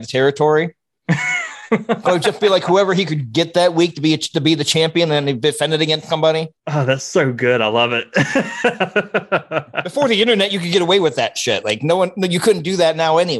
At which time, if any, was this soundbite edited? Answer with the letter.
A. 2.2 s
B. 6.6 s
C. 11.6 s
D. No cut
B